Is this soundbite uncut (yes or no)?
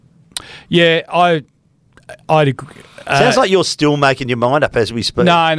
yes